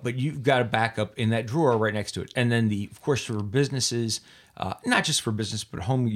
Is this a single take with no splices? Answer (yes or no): yes